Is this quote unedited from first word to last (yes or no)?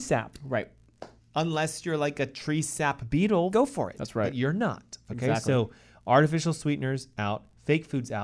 no